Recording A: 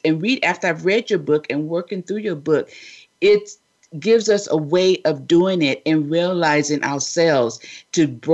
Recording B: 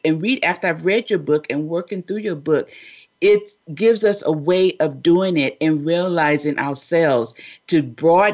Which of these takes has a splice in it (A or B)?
B